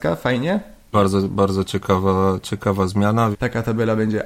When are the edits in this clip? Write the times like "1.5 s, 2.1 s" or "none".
0.9 s, 3.3 s